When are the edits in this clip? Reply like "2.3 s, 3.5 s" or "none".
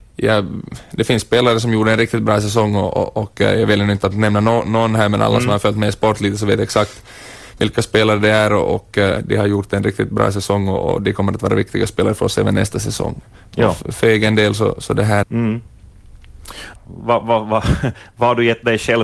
15.2 s, 16.8 s